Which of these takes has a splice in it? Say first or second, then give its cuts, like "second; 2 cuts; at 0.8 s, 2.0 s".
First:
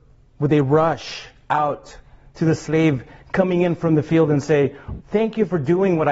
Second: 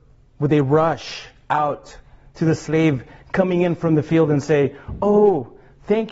first; 1 cut; at 5.0 s